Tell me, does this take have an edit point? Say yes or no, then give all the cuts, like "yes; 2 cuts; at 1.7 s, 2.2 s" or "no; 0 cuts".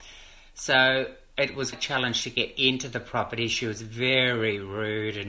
yes; 1 cut; at 1.7 s